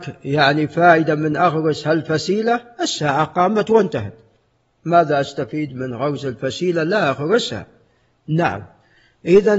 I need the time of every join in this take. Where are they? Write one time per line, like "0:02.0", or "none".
none